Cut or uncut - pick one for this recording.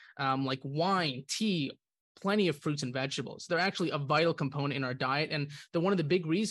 uncut